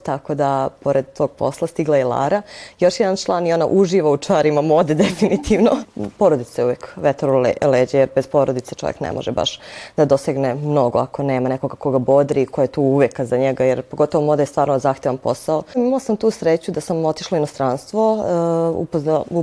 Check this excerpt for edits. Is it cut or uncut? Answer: uncut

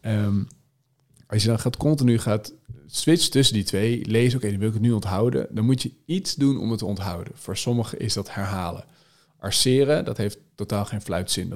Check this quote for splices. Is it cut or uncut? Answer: uncut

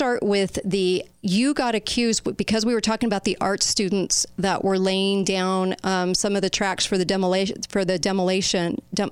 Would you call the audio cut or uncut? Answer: uncut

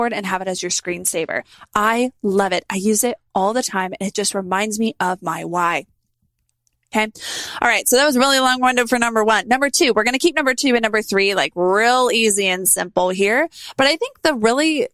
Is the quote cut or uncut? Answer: uncut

